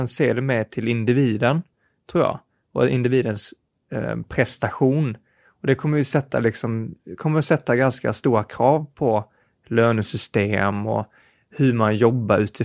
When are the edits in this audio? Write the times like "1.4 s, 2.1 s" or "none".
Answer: none